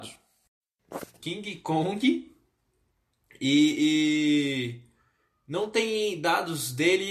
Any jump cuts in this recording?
yes; 1 cut; at 1.2 s

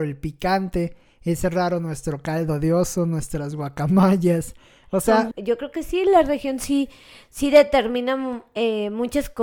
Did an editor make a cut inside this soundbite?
yes; 1 cut; at 5.3 s

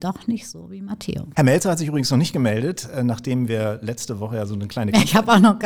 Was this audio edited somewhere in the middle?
yes; 1 cut; at 1.3 s

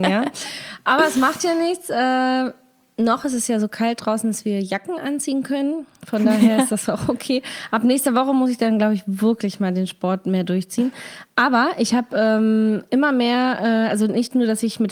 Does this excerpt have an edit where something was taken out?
no; 0 cuts

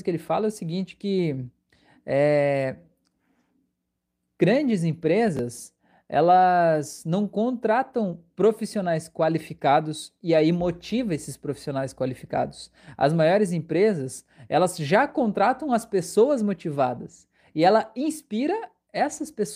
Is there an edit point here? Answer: no; 0 cuts

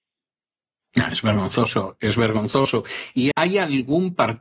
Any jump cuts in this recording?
yes; 1 cut; at 3.3 s

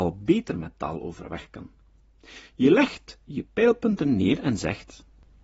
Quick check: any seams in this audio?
no; 0 cuts

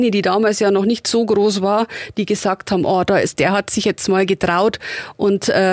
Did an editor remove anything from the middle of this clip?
yes; 1 cut; at 3.3 s

